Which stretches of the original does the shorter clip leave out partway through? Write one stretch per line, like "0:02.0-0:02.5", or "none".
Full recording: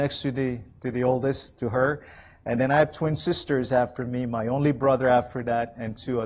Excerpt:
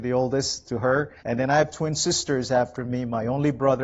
0:02.1-0:02.4